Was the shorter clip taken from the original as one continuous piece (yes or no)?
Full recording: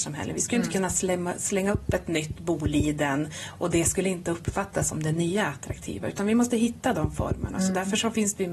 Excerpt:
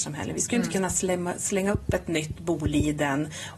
yes